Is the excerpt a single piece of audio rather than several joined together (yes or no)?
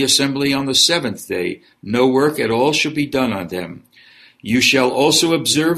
yes